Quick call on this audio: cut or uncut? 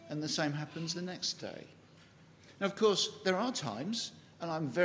uncut